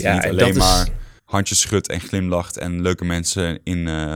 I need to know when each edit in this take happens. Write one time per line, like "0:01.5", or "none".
0:01.2